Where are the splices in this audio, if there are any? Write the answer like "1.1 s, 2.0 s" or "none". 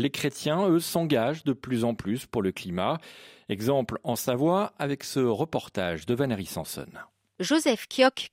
none